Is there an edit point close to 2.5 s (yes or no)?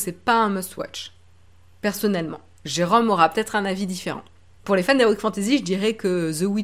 no